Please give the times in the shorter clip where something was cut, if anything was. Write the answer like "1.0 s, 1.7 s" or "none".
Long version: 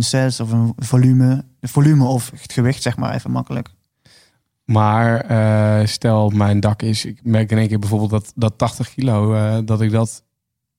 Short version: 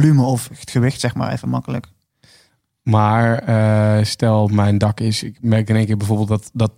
none